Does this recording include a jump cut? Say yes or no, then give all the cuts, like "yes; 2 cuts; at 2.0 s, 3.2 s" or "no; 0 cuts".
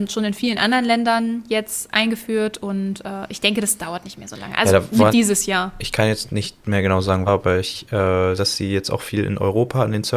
yes; 3 cuts; at 5.1 s, 7.3 s, 8.4 s